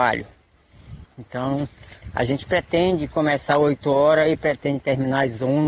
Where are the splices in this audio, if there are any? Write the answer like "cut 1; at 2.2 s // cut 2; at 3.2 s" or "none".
cut 1; at 1.0 s